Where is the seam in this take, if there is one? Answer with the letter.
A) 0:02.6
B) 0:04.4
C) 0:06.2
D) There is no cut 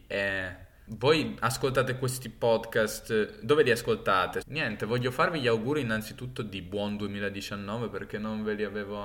B